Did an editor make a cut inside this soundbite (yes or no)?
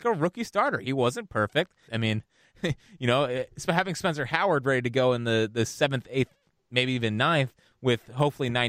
yes